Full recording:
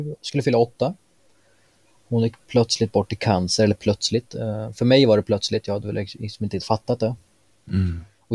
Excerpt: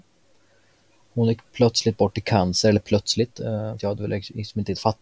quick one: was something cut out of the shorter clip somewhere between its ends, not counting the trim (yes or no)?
yes